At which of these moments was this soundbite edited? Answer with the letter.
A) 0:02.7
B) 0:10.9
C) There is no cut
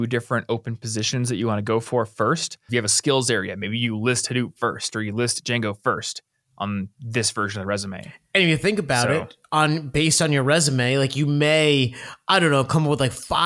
A